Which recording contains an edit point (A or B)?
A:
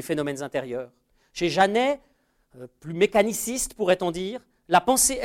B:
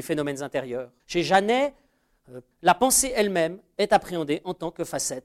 B